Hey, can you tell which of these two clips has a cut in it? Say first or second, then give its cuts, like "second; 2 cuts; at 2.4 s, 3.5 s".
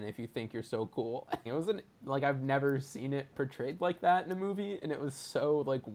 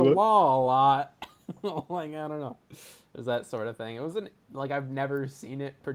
first; 1 cut; at 1.5 s